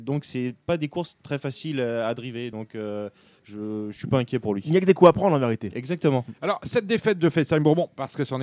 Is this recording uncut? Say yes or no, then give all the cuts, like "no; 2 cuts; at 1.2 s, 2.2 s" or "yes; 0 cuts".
yes; 0 cuts